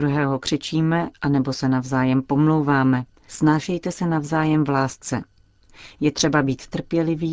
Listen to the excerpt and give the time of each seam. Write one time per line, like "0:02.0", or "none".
0:03.2